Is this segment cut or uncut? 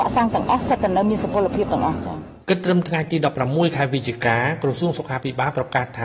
cut